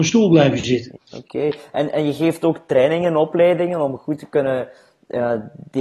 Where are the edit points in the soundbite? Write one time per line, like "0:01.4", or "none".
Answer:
0:01.0